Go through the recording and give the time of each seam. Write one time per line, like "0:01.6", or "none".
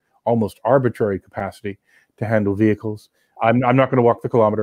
0:03.4